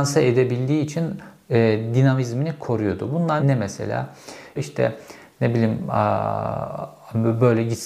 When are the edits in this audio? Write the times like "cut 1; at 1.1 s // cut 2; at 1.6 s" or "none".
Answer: cut 1; at 3.4 s // cut 2; at 4.6 s